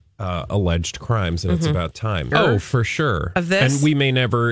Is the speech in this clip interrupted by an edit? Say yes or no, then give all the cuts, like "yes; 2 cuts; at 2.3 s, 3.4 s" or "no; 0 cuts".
yes; 1 cut; at 2.3 s